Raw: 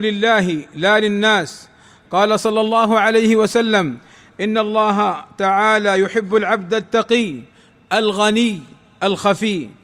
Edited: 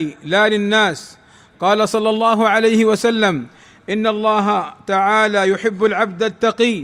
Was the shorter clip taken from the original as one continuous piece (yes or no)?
yes